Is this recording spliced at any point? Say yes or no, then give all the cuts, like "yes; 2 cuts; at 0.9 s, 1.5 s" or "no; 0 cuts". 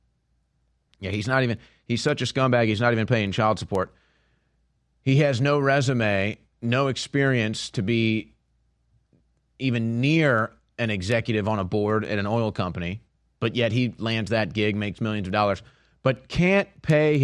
no; 0 cuts